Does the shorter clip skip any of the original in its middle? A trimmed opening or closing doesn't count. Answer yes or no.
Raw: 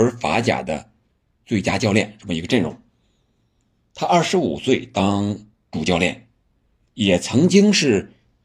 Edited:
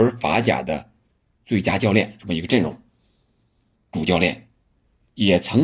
yes